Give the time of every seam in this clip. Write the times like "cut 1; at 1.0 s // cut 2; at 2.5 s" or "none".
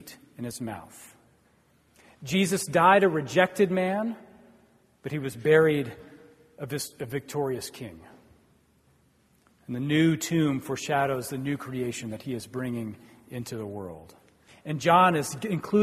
cut 1; at 14.5 s